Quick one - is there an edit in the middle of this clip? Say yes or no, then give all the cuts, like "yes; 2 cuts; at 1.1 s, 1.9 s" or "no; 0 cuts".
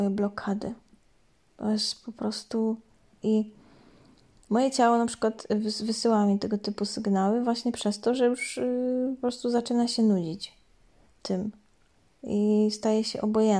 yes; 1 cut; at 3.2 s